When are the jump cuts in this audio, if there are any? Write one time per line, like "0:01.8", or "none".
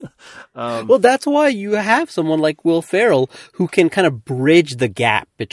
none